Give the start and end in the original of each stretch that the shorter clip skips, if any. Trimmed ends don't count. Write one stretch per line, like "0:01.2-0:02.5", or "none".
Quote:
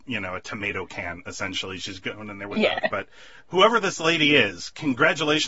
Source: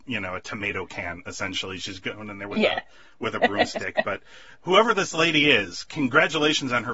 0:02.8-0:03.9